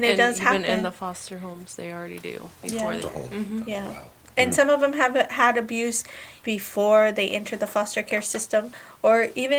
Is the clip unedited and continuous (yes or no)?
no